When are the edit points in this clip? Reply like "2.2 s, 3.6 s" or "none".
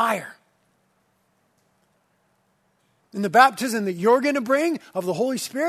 3.0 s